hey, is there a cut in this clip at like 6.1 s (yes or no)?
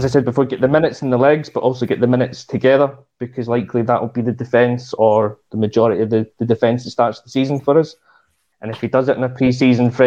no